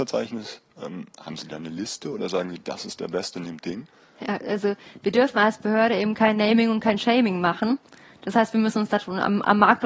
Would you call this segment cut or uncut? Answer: uncut